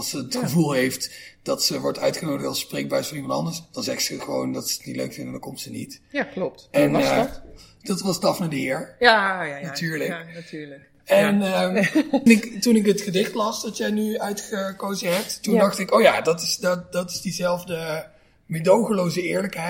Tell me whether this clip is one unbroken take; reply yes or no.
no